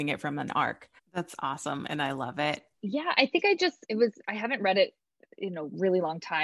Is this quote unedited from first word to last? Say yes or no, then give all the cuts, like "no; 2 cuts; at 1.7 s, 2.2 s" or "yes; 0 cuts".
no; 3 cuts; at 1.0 s, 2.7 s, 3.8 s